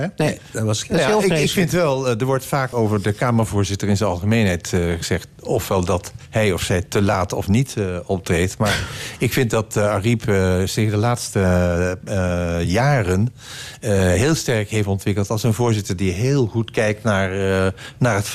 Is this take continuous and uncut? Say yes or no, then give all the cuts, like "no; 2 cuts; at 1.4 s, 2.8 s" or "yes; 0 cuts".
no; 1 cut; at 2.7 s